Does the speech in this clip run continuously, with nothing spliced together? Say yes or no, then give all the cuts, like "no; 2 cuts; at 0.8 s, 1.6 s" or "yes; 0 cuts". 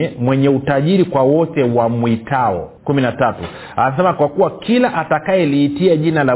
no; 1 cut; at 2.8 s